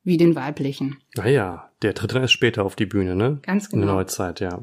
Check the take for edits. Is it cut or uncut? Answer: uncut